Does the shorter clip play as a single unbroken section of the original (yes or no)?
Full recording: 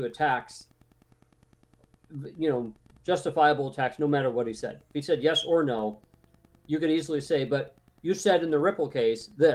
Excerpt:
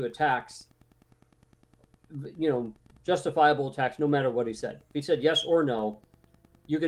yes